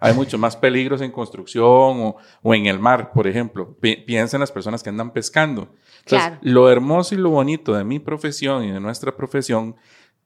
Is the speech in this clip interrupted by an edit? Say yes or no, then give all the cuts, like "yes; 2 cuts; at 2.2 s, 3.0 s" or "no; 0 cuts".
no; 0 cuts